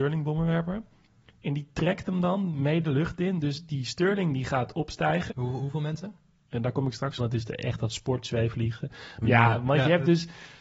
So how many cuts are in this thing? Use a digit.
3